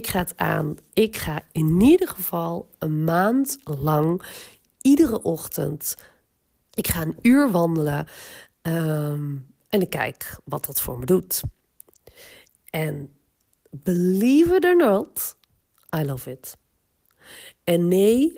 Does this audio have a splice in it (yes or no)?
yes